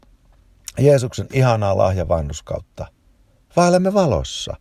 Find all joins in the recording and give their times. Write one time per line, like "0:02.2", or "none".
none